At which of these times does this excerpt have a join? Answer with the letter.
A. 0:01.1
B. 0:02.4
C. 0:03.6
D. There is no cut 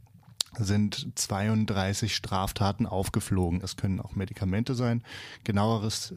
C